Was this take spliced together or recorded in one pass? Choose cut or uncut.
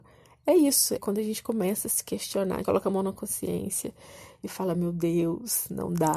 cut